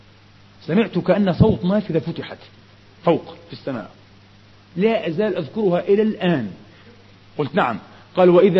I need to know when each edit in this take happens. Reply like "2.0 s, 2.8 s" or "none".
none